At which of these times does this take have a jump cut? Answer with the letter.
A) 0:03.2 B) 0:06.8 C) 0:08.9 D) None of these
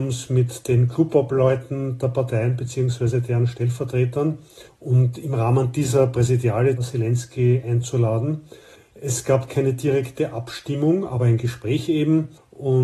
B